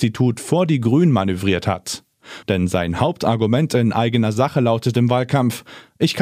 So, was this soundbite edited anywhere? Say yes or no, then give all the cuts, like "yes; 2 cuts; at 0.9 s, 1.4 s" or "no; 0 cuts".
yes; 1 cut; at 2.4 s